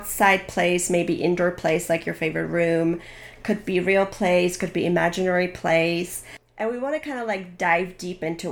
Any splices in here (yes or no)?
no